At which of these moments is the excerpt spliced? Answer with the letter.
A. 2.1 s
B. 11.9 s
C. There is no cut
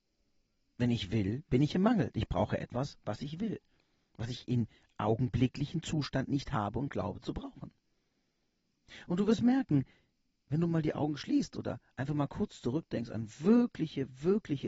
C